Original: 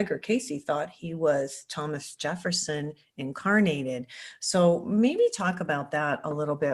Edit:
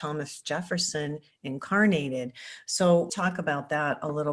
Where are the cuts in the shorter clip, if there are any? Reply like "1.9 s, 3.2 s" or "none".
3.1 s